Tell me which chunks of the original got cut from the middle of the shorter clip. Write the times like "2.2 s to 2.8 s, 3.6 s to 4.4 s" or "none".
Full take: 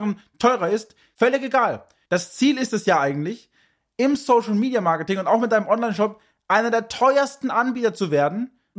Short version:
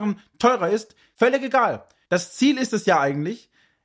none